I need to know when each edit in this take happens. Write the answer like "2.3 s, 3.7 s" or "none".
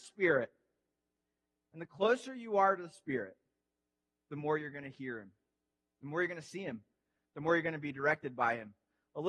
none